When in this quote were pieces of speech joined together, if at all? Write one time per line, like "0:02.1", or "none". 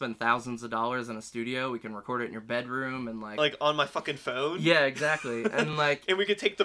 none